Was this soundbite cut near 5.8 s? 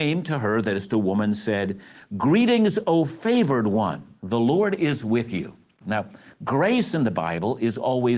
yes; 2 cuts; at 4.2 s, 5.8 s

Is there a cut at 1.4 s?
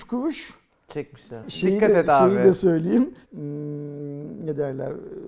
yes; 2 cuts; at 1.4 s, 3.3 s

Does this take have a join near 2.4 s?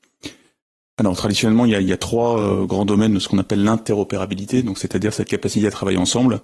no; 0 cuts

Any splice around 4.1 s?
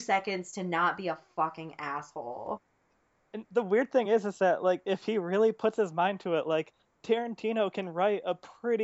no; 0 cuts

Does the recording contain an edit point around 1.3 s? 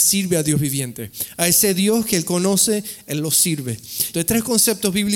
no; 1 cut; at 4.1 s

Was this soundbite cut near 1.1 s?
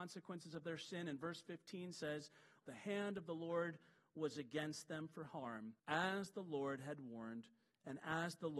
no; 2 cuts; at 2.6 s, 5.8 s

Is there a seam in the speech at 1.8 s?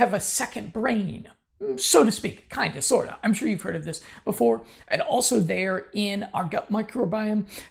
no; 0 cuts

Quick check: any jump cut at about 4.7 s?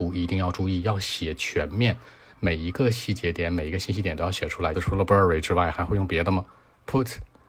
yes; 1 cut; at 4.7 s

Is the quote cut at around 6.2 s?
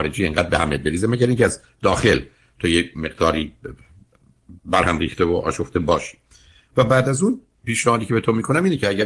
no; 1 cut; at 4.6 s

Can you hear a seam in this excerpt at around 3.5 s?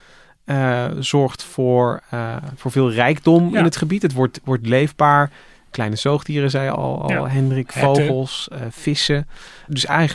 no; 0 cuts

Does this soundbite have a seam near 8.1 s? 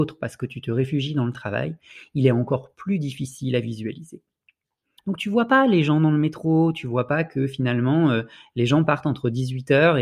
no; 1 cut; at 5.0 s

